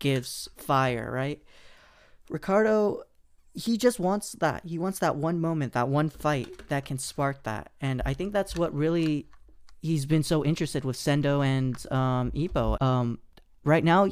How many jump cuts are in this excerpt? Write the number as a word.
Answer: one